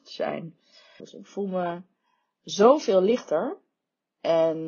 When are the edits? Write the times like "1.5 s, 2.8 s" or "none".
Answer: 1.0 s